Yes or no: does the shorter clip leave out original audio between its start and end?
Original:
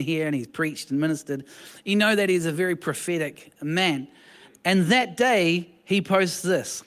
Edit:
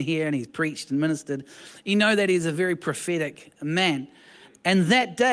no